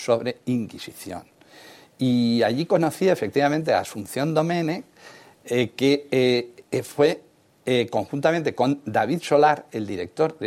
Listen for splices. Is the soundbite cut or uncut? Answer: uncut